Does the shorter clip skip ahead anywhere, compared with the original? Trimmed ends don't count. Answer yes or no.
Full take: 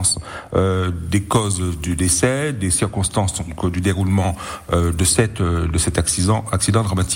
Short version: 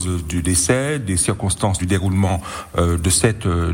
yes